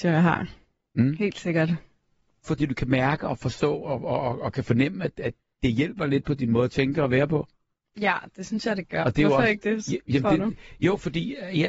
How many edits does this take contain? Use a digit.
2